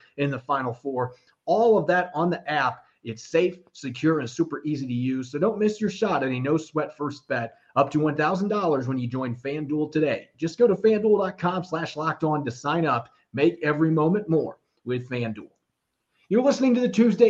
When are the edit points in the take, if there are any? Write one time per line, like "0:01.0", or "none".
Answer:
none